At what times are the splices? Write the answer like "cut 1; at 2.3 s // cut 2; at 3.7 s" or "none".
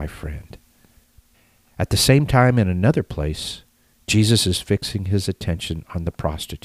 none